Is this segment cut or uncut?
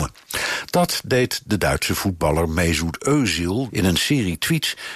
cut